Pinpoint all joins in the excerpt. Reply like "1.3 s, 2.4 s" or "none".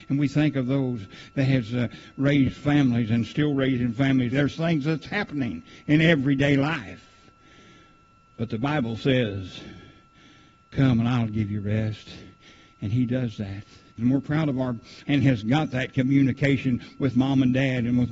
4.3 s, 14.0 s, 15.0 s